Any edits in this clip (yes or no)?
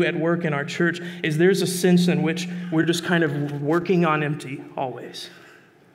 no